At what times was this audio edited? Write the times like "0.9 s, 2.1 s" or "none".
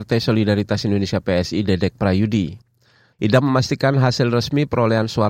3.1 s

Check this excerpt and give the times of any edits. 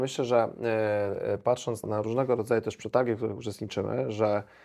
1.8 s

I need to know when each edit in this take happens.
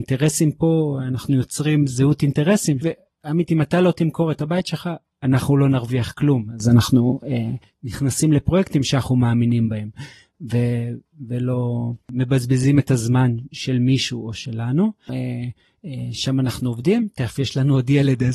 2.8 s, 15.1 s

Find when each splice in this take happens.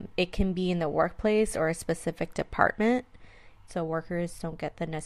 3.7 s

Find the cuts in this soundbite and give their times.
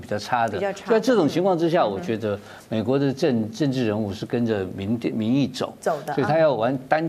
none

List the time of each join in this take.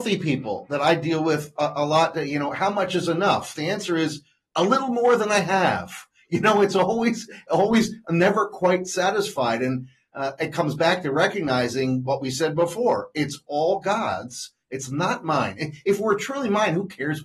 none

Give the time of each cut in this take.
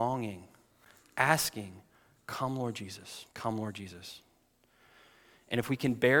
3.3 s

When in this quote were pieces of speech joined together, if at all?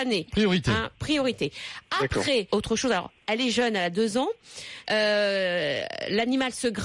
2.5 s, 4.8 s

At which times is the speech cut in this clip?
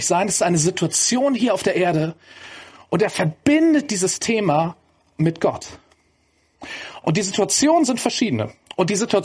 7.0 s

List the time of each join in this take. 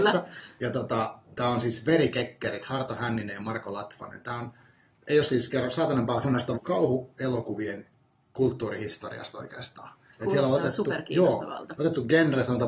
6.5 s

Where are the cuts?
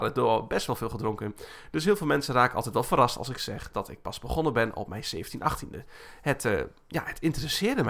none

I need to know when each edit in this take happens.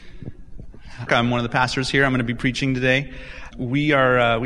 1.1 s, 3.5 s

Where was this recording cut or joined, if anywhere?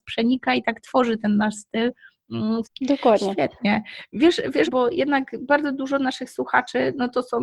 2.6 s, 4.7 s

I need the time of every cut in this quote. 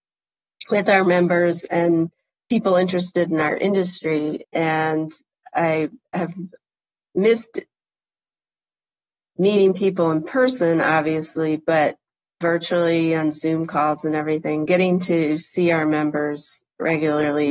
4.4 s, 12.4 s

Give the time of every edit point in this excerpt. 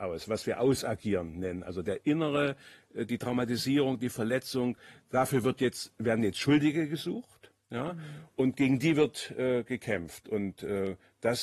none

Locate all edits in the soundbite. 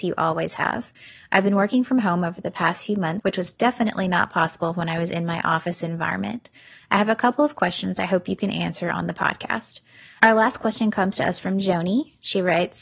3.2 s, 10.2 s

